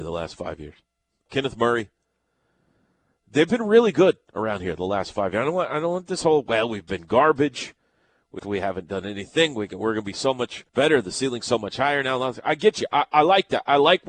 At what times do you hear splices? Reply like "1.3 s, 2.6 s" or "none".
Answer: 1.3 s, 8.4 s, 10.7 s